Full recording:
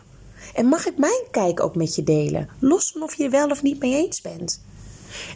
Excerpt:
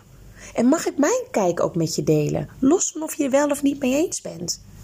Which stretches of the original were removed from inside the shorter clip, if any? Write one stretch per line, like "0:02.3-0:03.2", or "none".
none